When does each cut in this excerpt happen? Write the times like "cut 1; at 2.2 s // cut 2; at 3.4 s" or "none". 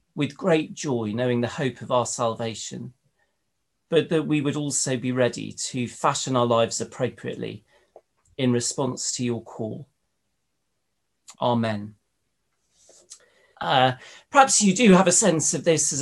cut 1; at 11.3 s // cut 2; at 13.5 s